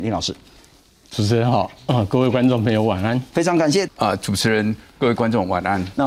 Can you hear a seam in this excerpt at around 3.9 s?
yes; 1 cut; at 3.9 s

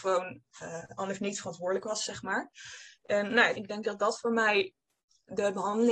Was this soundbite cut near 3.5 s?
yes; 1 cut; at 3.5 s

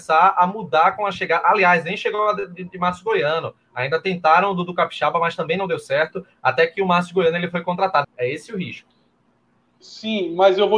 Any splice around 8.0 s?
yes; 1 cut; at 8.0 s

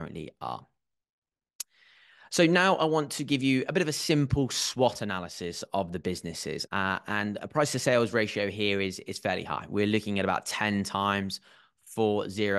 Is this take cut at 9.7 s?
no; 1 cut; at 6.7 s

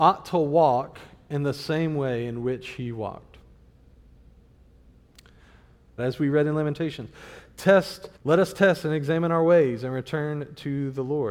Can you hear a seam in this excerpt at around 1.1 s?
no; 2 cuts; at 6.0 s, 8.2 s

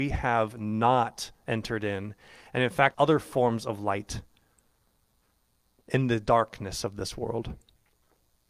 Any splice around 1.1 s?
no; 1 cut; at 2.9 s

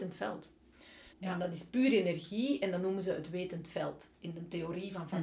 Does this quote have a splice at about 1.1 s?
yes; 1 cut; at 1.1 s

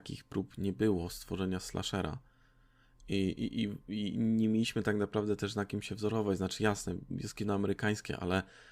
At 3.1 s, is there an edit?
no; 0 cuts

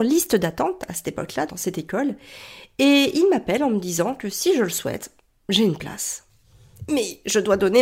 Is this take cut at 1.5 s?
yes; 1 cut; at 1.5 s

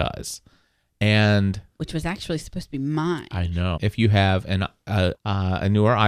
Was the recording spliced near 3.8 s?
yes; 2 cuts; at 3.8 s, 5.1 s

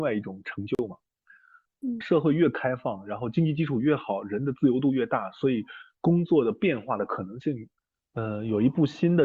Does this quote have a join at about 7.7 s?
no; 1 cut; at 2.0 s

